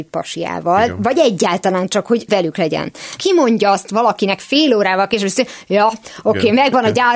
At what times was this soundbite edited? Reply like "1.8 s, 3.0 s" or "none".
3.2 s